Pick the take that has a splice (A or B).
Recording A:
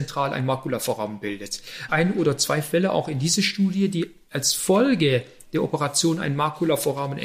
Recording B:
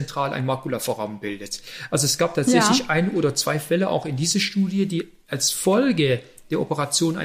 A